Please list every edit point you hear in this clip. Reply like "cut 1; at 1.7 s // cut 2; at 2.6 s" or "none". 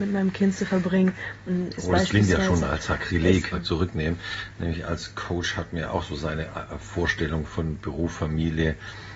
cut 1; at 3.5 s